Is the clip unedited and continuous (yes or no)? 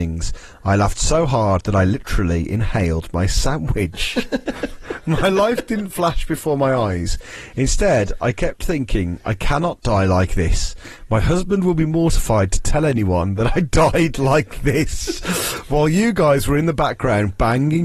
yes